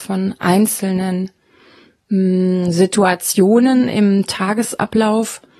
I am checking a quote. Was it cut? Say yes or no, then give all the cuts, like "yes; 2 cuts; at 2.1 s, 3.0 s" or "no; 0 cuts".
no; 0 cuts